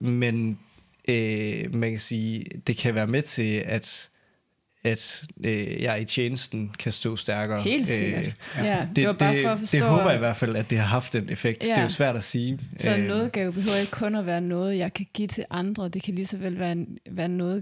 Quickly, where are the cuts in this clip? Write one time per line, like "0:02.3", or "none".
none